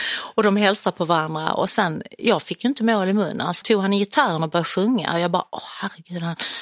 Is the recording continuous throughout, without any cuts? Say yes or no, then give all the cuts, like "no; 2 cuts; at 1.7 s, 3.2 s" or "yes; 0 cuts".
no; 1 cut; at 3.6 s